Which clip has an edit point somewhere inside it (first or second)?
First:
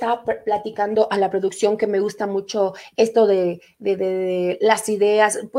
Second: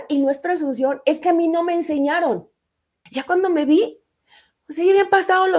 second